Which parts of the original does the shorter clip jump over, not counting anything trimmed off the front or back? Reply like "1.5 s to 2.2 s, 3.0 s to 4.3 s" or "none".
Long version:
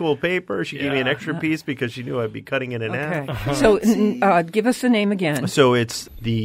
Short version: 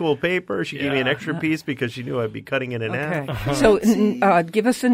none